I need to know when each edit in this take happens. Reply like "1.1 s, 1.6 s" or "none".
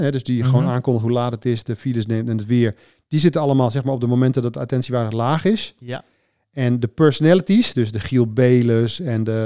none